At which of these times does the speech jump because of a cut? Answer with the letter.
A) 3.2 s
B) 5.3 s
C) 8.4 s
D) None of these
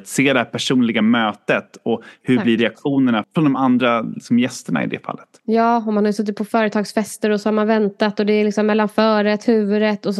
A